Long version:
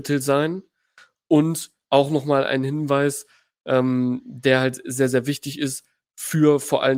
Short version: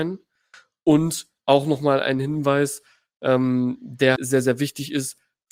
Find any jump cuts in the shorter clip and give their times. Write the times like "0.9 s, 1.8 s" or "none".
4.2 s